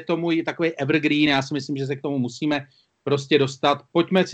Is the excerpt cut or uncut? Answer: uncut